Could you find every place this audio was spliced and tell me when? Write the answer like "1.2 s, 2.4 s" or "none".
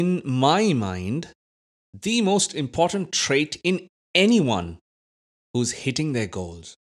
none